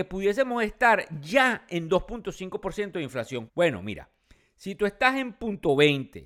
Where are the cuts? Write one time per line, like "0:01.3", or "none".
0:03.5